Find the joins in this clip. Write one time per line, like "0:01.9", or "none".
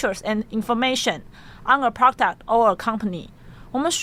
none